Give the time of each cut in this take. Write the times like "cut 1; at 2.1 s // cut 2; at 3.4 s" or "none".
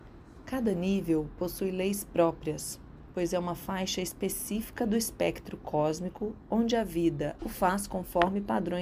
cut 1; at 7.4 s